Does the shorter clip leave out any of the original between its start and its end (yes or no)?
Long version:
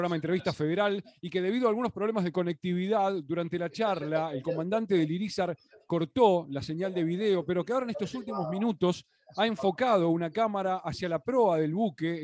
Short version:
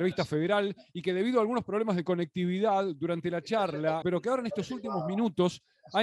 yes